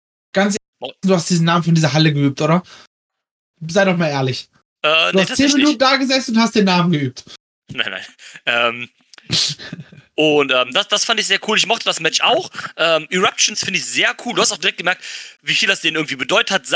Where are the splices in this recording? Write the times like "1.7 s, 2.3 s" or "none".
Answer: 1.0 s, 13.5 s